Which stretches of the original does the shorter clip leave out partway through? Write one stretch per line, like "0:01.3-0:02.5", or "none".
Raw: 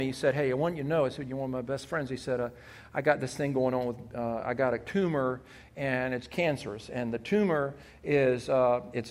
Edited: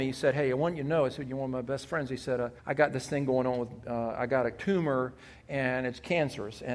0:02.6-0:02.9